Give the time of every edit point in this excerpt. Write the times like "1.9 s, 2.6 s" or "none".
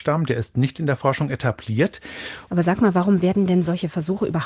2.5 s